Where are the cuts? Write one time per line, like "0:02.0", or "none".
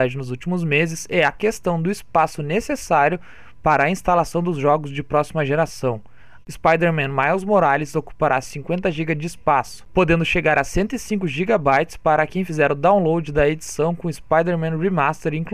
0:06.4